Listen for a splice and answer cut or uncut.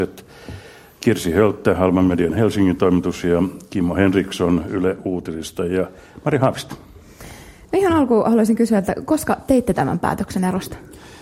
uncut